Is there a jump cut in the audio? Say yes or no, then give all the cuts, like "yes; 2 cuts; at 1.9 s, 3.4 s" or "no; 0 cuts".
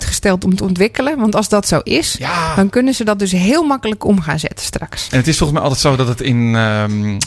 yes; 1 cut; at 5.1 s